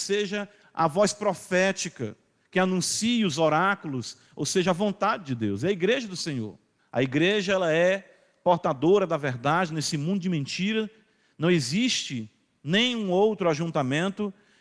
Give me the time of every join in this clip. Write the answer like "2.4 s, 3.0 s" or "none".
6.8 s